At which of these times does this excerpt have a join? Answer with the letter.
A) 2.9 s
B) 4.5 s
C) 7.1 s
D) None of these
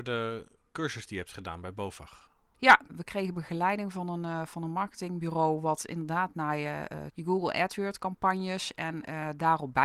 C